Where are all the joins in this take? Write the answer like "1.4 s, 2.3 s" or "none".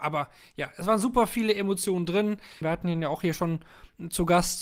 2.6 s